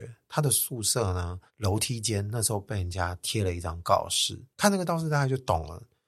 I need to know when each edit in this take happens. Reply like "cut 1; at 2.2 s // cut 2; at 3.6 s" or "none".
cut 1; at 1.5 s // cut 2; at 4.5 s